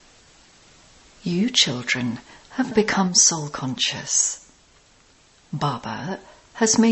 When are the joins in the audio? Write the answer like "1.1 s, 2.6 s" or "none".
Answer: 2.7 s